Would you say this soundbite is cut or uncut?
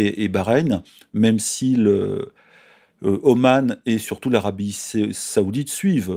uncut